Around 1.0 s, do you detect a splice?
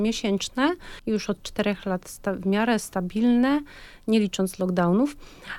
yes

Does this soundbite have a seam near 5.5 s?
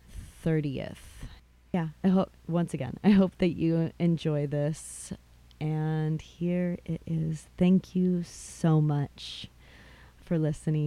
no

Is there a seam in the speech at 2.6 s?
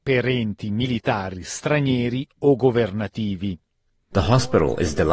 no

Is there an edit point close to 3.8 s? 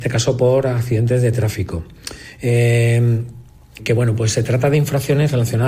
yes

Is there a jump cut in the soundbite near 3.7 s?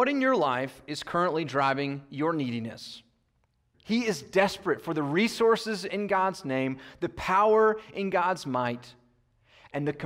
yes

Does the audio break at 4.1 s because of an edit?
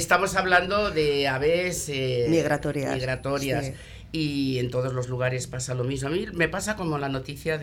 no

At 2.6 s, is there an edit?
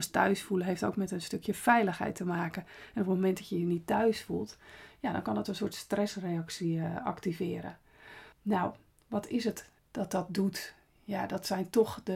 no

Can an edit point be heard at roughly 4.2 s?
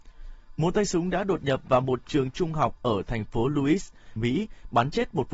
yes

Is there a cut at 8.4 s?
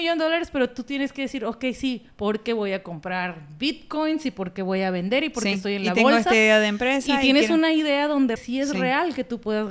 yes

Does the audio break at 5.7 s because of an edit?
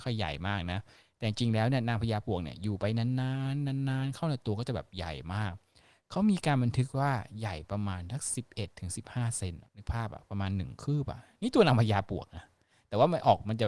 no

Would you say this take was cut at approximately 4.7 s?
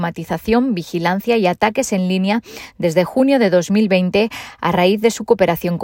no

